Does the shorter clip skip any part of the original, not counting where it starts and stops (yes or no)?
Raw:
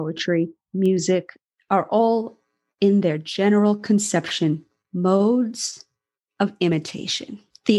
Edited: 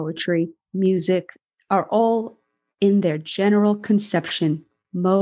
no